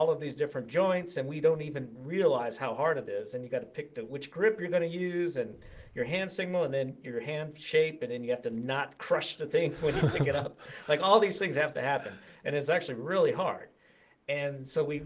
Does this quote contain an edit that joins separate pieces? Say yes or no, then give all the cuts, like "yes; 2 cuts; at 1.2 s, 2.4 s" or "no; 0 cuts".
no; 0 cuts